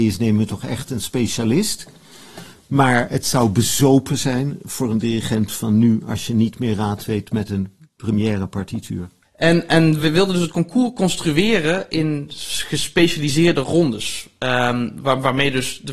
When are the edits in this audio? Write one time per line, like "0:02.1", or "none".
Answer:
0:10.0